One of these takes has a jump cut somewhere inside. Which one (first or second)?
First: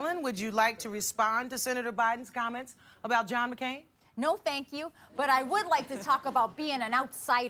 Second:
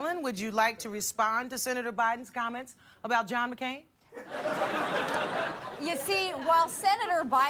second